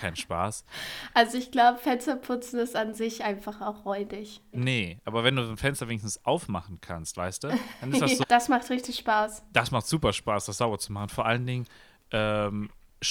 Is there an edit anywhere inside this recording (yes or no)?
yes